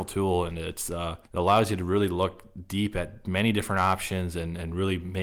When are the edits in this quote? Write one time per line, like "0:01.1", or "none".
0:01.2